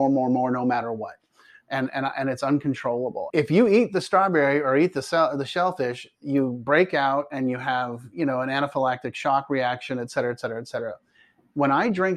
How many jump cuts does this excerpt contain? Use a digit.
1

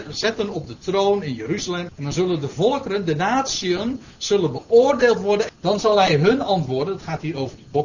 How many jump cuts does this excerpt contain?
2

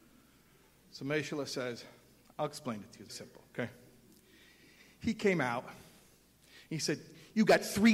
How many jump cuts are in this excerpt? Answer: 1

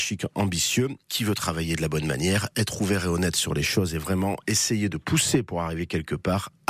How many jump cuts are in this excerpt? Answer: 1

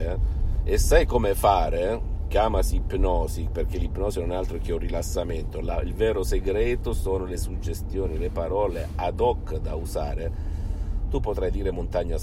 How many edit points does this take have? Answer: 0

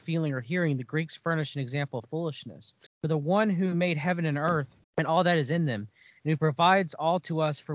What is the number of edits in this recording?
2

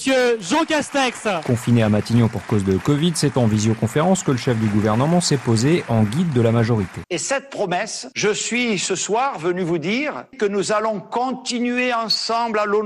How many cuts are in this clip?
1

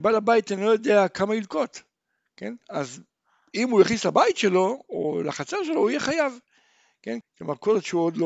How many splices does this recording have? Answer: 2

